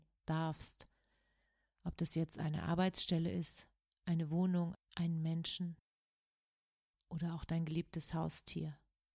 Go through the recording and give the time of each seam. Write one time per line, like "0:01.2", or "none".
0:04.7